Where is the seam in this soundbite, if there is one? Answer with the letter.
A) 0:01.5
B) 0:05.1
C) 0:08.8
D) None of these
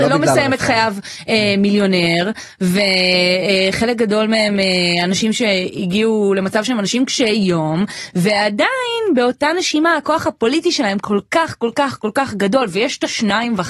D